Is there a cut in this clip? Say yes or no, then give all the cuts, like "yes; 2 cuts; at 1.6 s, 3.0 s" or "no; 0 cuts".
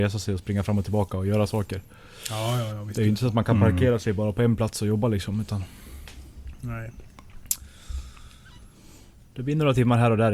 no; 0 cuts